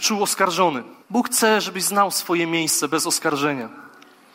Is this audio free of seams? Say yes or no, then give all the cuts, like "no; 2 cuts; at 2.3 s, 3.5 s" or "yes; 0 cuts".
no; 1 cut; at 1.0 s